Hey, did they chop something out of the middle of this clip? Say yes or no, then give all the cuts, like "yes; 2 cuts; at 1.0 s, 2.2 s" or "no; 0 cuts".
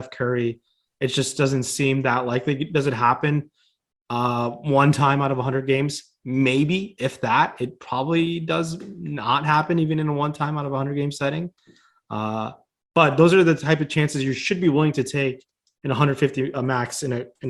no; 0 cuts